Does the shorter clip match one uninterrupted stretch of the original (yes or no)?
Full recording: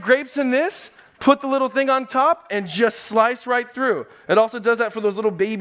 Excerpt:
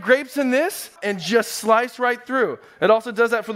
no